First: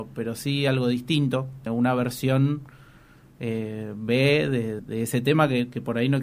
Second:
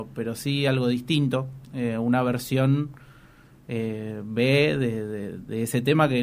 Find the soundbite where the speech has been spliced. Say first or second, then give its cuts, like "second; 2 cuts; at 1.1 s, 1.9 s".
first; 2 cuts; at 1.7 s, 4.8 s